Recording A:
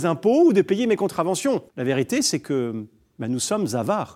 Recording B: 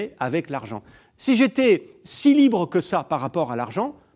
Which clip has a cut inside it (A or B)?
A